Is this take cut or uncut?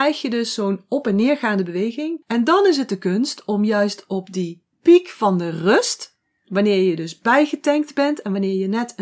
cut